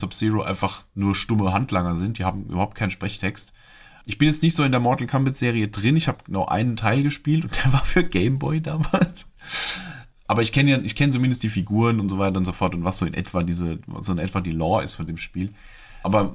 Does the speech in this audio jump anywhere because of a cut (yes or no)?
no